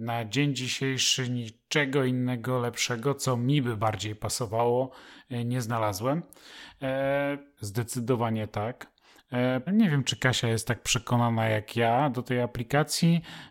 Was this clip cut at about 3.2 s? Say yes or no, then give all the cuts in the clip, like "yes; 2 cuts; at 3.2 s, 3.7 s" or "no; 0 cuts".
no; 2 cuts; at 7.6 s, 9.7 s